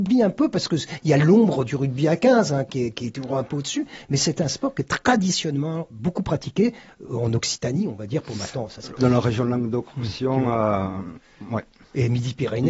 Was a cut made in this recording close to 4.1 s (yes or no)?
no